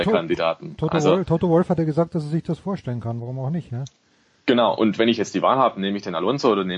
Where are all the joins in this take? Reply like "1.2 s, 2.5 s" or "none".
none